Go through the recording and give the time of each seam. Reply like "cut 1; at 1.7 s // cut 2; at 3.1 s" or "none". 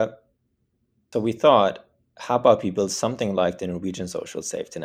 cut 1; at 1.1 s